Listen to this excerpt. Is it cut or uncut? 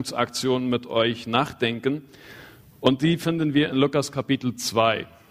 uncut